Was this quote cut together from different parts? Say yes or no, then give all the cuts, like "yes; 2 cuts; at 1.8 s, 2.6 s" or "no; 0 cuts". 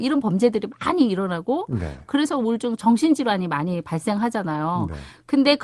no; 0 cuts